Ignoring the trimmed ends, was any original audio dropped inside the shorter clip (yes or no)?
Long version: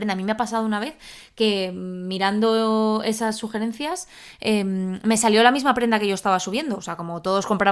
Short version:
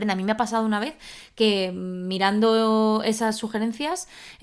no